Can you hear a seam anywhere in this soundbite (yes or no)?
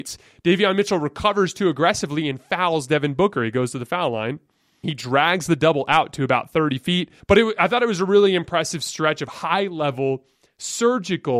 yes